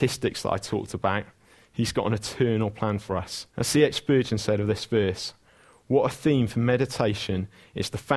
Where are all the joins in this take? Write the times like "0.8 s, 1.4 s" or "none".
3.5 s